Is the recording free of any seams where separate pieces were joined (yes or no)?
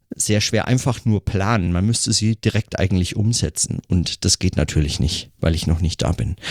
yes